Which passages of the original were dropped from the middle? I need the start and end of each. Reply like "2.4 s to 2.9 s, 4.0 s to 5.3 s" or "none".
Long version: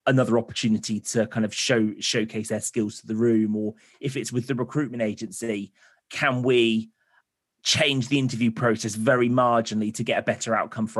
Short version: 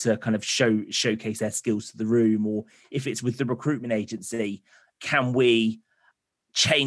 none